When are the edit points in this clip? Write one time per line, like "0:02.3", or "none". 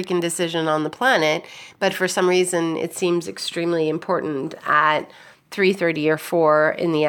none